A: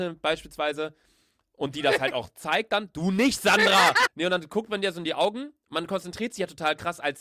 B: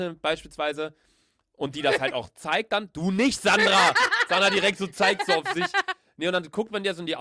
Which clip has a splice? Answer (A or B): A